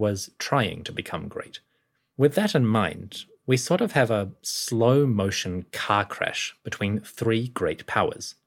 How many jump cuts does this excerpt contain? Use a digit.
1